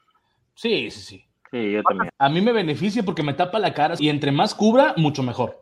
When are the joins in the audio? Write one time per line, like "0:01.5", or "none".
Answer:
0:02.1
0:04.0